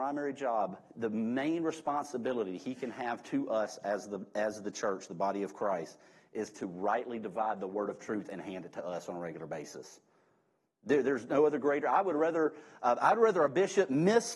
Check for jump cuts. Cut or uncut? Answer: uncut